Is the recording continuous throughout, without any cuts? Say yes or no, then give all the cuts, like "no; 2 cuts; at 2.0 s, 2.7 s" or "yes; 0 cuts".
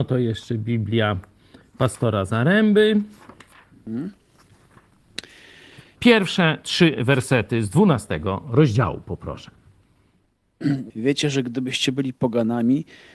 no; 2 cuts; at 6.0 s, 10.9 s